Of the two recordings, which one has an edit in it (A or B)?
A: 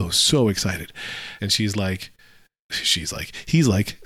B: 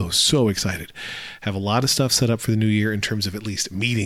A